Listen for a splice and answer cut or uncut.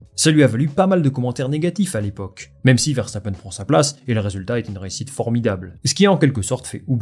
uncut